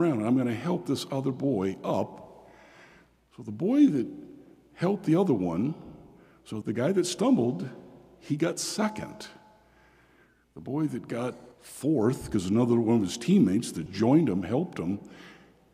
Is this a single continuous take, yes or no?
no